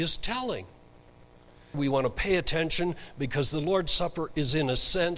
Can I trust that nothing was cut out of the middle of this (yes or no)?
no